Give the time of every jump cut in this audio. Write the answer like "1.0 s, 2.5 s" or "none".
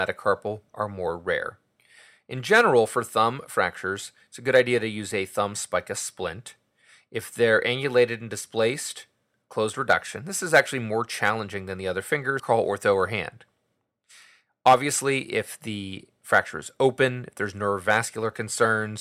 12.4 s